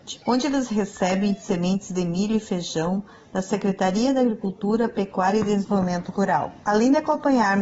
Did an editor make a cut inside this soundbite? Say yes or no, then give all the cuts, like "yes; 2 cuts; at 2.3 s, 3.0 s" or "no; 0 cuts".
no; 0 cuts